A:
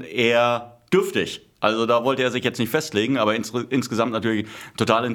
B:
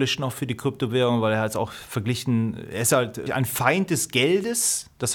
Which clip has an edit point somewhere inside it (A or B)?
B